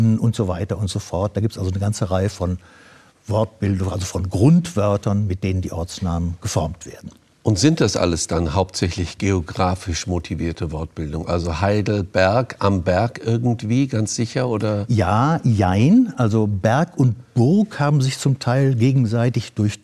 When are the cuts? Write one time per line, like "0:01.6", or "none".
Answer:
none